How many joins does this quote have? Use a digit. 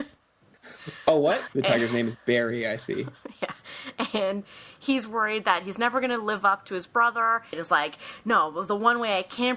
2